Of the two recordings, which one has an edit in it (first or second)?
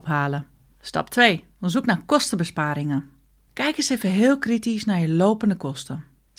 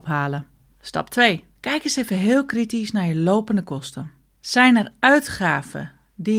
second